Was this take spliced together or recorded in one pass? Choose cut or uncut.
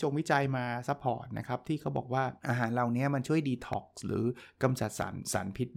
cut